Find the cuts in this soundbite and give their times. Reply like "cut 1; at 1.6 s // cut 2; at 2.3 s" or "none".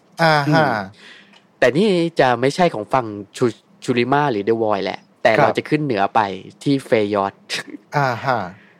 none

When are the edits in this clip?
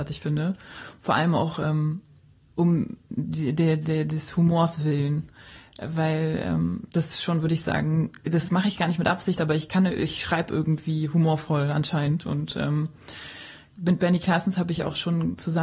none

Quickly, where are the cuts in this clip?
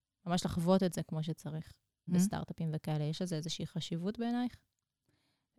cut 1; at 2.1 s

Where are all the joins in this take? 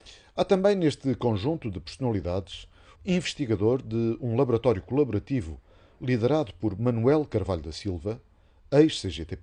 cut 1; at 3.0 s

